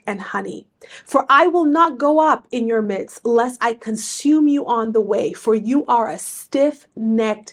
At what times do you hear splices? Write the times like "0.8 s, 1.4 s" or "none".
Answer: none